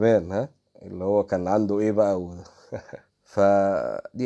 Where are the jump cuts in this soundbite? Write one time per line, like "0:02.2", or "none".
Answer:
0:03.1

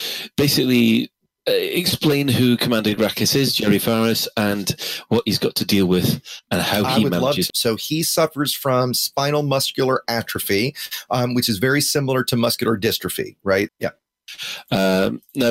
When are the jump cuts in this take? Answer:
0:07.5
0:13.7

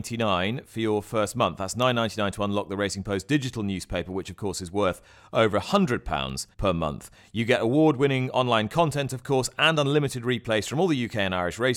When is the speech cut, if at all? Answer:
0:06.5

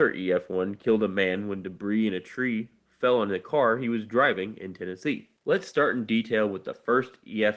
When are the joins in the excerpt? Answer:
0:05.4

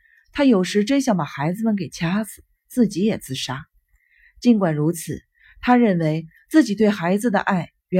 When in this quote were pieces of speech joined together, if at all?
none

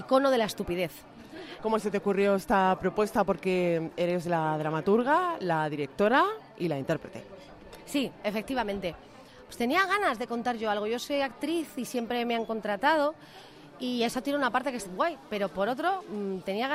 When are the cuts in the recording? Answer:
0:01.6
0:14.9

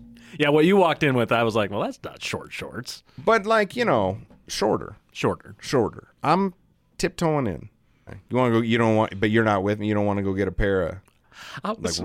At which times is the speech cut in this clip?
0:08.1

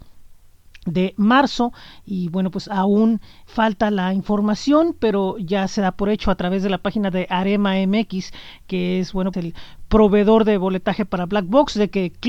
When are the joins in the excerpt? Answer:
0:03.5
0:09.3

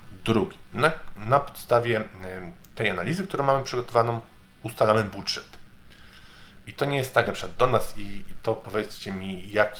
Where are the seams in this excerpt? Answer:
0:07.3
0:08.4

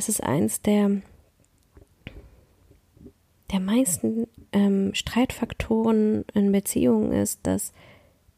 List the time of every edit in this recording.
none

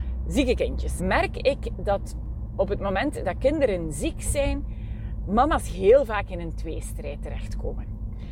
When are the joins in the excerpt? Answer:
0:01.0

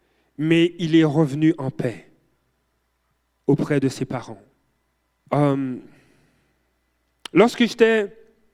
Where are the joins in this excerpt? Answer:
0:05.2

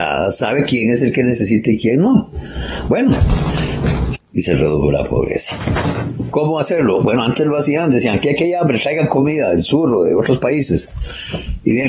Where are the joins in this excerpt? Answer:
0:04.1
0:06.3

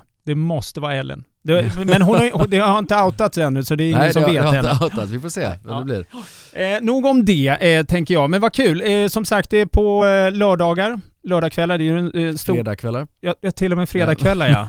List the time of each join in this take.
none

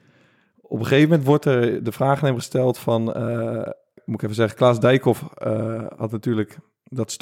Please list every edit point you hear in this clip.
0:04.0

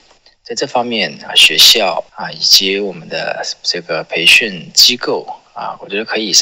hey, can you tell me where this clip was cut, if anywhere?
0:01.3

